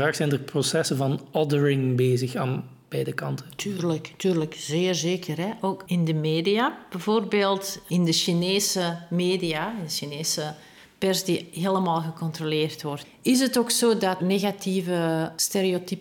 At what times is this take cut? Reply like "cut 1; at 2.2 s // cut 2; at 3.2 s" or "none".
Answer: cut 1; at 13.0 s // cut 2; at 14.2 s

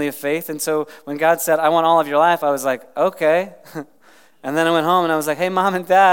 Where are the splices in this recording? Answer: none

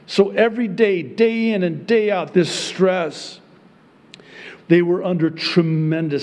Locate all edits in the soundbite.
cut 1; at 2.3 s // cut 2; at 4.6 s

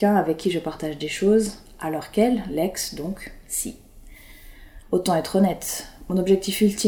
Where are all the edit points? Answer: cut 1; at 4.8 s

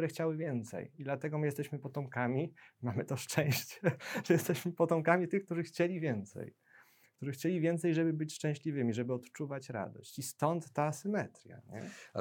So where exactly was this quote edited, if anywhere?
none

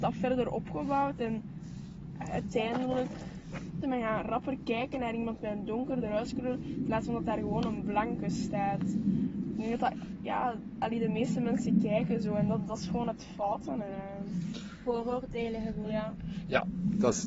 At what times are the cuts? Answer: cut 1; at 3.8 s

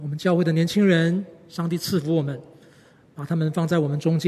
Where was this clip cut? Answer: none

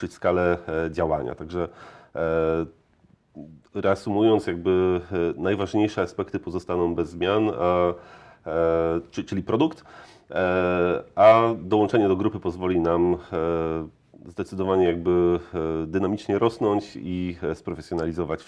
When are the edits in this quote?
none

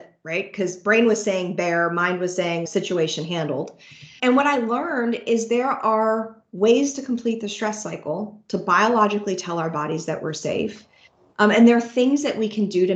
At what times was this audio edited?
cut 1; at 2.7 s // cut 2; at 4.2 s

